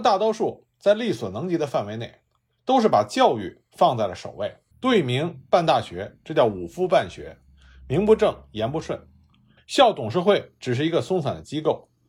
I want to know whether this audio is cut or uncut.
cut